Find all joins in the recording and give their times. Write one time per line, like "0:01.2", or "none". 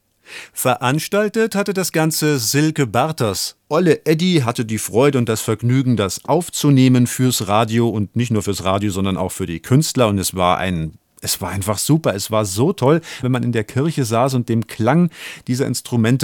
0:13.2